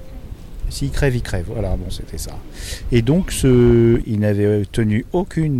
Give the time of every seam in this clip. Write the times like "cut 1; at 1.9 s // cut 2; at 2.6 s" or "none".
cut 1; at 1.9 s // cut 2; at 4.0 s